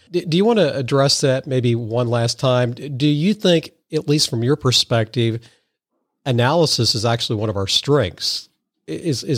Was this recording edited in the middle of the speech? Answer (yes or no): no